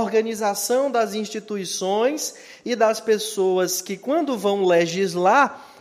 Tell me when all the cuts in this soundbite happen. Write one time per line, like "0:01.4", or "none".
none